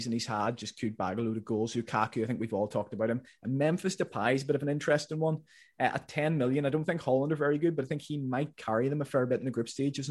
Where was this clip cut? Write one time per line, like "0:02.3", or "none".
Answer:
none